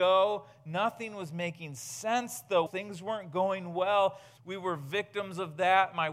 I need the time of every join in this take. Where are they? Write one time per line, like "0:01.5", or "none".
0:02.7
0:04.4

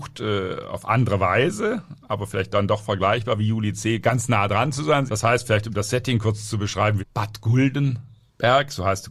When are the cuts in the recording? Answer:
0:05.1
0:07.0

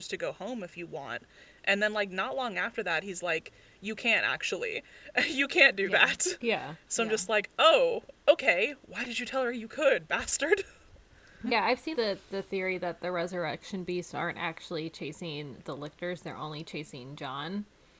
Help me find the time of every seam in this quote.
0:11.9

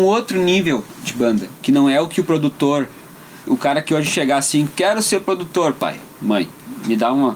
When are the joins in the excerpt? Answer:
0:03.5

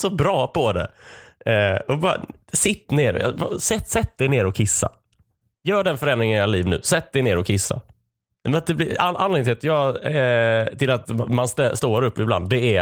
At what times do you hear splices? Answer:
none

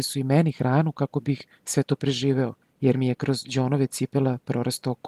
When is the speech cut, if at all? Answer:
0:02.6

